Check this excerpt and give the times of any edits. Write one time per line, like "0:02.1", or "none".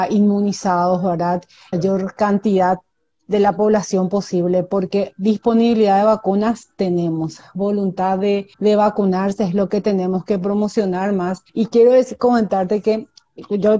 0:01.7
0:08.5
0:11.5